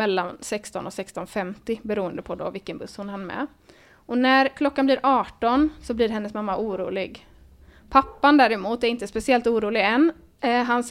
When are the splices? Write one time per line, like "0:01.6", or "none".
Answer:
none